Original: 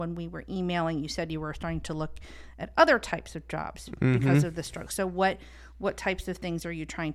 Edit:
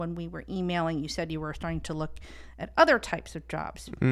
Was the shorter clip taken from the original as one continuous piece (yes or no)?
yes